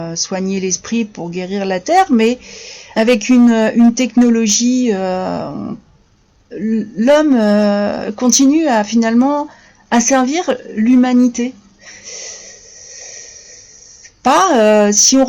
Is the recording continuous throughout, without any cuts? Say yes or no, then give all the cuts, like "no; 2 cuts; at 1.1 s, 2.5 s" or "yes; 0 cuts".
no; 2 cuts; at 2.9 s, 6.5 s